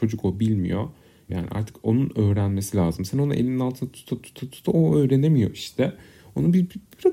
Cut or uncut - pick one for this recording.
cut